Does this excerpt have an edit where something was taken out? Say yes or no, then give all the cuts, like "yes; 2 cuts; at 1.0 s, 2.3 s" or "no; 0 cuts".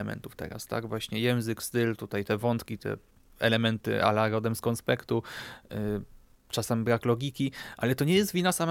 no; 0 cuts